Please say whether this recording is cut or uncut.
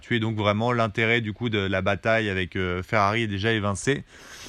uncut